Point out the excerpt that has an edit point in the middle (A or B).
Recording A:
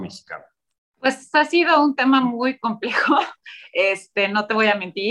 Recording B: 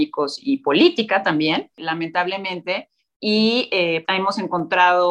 B